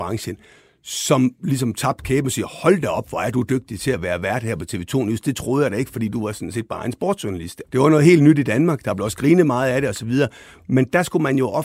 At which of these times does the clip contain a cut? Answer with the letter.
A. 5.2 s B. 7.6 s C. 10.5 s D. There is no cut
B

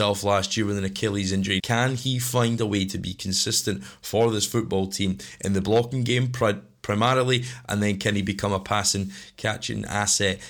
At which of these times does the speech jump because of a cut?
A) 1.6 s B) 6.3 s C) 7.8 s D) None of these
A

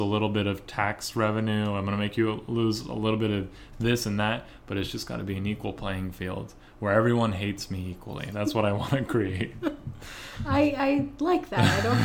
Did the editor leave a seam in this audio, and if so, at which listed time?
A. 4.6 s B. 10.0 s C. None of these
C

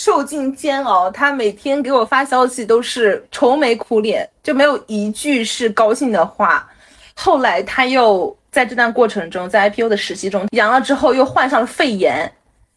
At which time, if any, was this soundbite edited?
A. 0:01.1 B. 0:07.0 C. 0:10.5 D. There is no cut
C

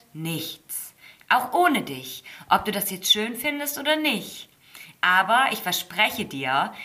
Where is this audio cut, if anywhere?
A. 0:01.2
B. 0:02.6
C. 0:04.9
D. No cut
A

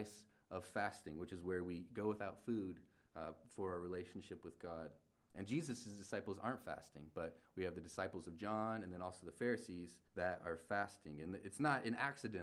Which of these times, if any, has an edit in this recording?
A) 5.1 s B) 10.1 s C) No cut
B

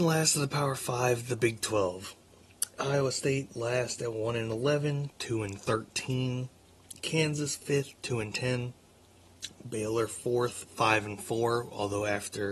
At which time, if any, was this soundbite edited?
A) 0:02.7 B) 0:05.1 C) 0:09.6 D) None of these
B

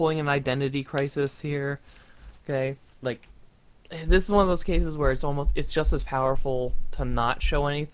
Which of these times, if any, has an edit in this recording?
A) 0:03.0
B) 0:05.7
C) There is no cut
A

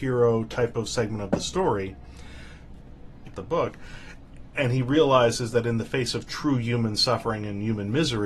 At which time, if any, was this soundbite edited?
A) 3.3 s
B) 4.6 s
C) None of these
A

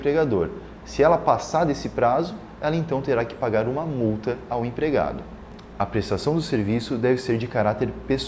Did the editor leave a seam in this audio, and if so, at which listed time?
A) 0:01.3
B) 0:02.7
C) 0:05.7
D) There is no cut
C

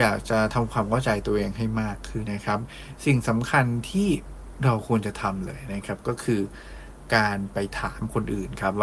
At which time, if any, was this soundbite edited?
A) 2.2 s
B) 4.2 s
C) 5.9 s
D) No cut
A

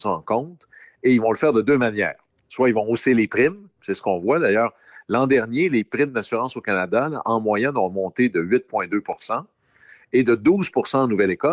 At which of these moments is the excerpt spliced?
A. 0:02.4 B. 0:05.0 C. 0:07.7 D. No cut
D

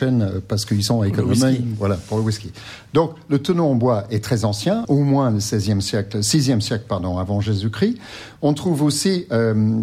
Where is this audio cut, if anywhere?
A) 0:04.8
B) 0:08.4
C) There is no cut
A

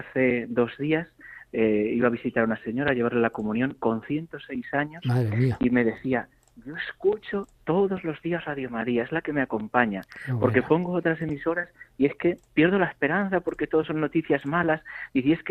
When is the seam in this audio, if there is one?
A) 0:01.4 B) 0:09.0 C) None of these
C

